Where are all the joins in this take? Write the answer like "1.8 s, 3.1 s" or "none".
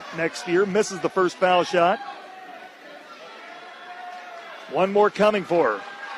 none